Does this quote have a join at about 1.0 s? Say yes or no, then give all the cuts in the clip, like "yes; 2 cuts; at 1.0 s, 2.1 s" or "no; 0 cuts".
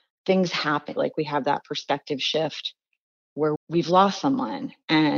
yes; 2 cuts; at 1.0 s, 3.6 s